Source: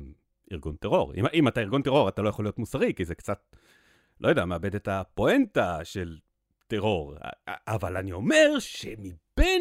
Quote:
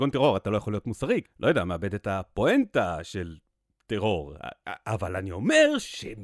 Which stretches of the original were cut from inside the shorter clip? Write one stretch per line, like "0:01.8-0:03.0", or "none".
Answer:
0:02.9-0:04.0